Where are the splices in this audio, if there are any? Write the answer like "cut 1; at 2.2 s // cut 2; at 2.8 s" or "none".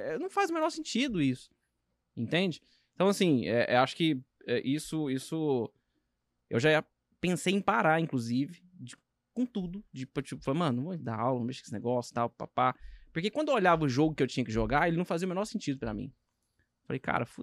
none